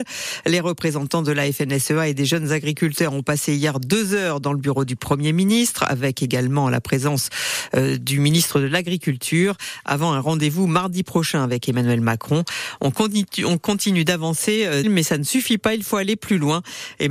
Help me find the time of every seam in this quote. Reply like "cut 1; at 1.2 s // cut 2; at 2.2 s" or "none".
cut 1; at 14.8 s

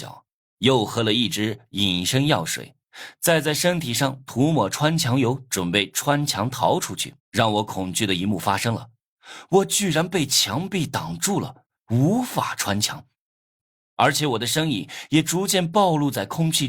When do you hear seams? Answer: cut 1; at 7.2 s

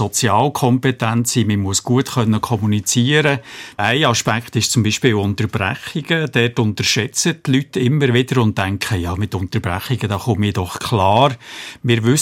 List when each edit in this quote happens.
cut 1; at 3.8 s

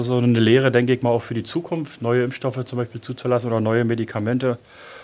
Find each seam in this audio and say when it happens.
none

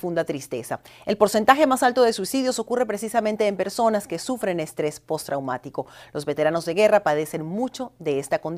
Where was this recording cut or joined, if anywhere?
none

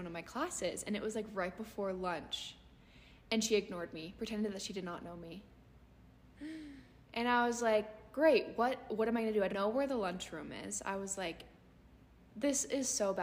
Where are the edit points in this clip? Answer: cut 1; at 9.5 s

